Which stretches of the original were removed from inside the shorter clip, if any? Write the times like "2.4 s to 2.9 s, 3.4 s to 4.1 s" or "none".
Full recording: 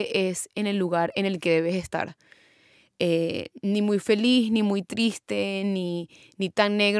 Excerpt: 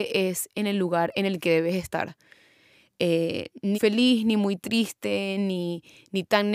3.7 s to 4.0 s